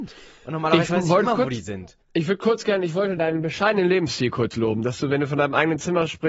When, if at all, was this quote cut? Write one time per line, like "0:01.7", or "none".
0:02.0
0:03.2